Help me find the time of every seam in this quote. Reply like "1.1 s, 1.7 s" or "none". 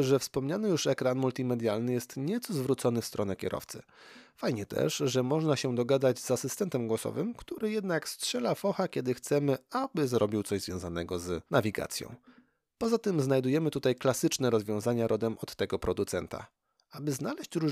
11.5 s